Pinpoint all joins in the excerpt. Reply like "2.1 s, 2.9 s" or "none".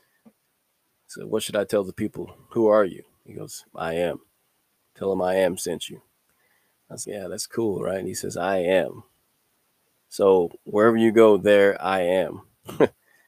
7.0 s